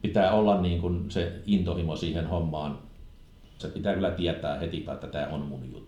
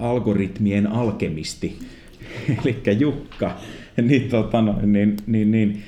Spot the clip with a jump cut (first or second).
first